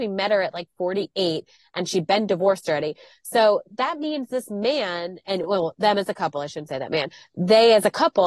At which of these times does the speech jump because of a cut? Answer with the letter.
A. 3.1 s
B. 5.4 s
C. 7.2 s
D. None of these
D